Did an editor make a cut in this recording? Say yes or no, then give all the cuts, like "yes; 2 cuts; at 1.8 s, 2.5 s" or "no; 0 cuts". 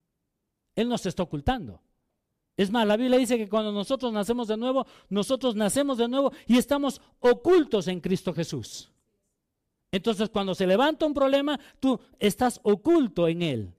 no; 0 cuts